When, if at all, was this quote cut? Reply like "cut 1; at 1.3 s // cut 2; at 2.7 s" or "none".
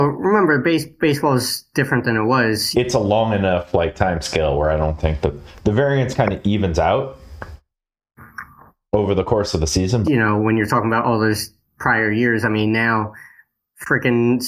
cut 1; at 2.7 s // cut 2; at 10.0 s